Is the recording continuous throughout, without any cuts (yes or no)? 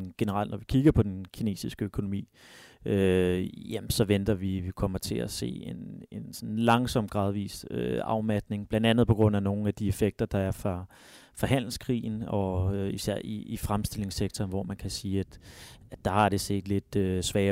yes